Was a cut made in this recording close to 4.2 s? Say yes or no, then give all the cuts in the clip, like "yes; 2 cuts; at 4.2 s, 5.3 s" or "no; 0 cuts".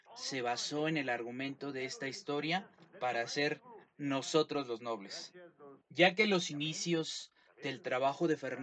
no; 1 cut; at 5.8 s